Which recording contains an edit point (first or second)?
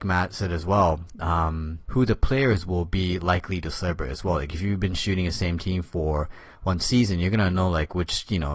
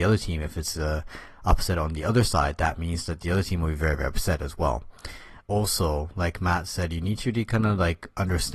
second